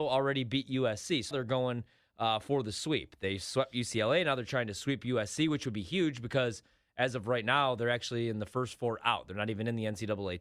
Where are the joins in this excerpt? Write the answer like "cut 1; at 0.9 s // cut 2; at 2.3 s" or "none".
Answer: cut 1; at 1.3 s